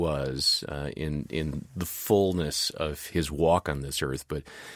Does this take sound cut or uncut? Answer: cut